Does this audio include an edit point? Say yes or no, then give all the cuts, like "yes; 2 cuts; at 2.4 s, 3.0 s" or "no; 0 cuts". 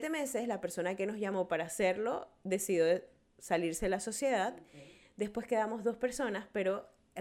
no; 0 cuts